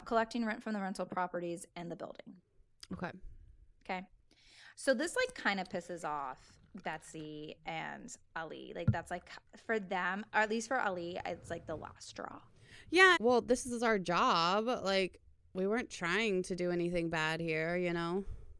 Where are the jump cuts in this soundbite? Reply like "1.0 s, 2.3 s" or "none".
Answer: 13.2 s